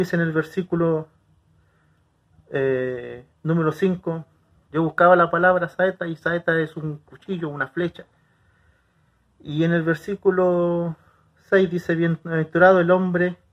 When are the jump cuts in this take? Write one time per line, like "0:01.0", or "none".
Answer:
0:04.7